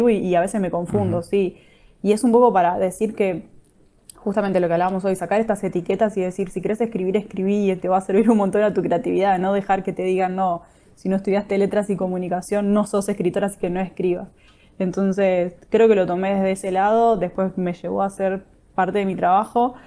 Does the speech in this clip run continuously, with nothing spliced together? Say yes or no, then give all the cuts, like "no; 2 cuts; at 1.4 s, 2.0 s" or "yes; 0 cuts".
yes; 0 cuts